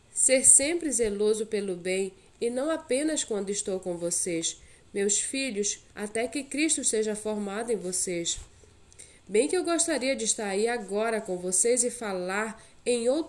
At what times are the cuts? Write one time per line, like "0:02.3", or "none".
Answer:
0:05.9